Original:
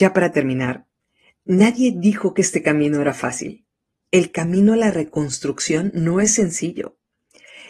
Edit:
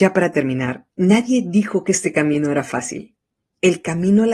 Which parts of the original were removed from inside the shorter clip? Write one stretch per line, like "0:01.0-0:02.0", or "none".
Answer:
0:00.9-0:01.4